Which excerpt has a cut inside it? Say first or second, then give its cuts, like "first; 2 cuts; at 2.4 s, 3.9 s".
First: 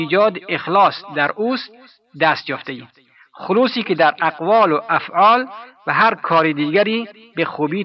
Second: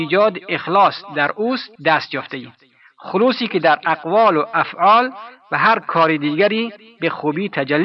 second; 1 cut; at 1.8 s